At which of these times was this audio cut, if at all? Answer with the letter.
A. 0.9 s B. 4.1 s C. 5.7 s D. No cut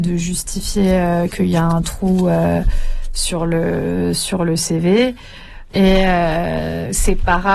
C